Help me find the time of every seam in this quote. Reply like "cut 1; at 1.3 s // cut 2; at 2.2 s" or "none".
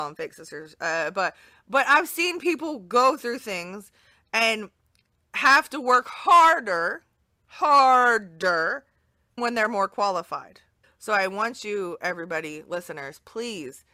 cut 1; at 9.4 s // cut 2; at 10.8 s